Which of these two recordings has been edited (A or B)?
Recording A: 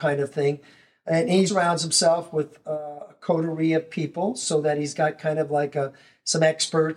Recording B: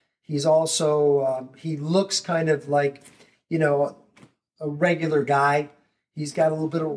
A